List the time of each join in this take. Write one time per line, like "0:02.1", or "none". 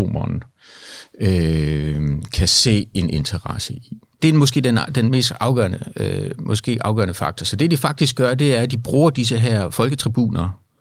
none